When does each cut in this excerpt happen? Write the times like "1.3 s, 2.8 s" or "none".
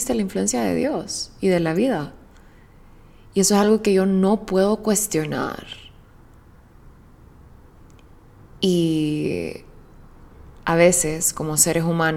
none